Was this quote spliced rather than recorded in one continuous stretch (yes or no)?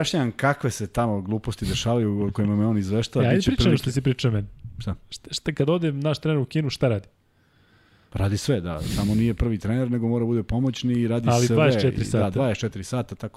no